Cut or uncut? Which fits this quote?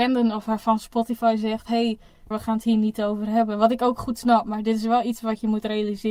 cut